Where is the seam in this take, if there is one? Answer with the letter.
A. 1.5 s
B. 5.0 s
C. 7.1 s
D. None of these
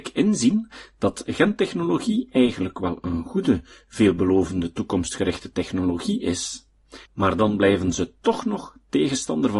C